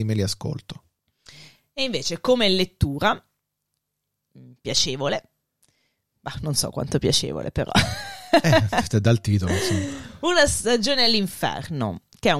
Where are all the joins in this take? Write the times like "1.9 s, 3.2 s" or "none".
none